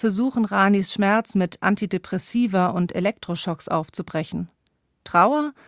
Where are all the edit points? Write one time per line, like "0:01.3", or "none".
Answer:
none